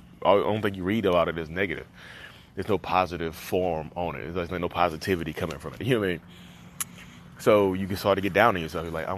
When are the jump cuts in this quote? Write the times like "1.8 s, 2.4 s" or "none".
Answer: 5.8 s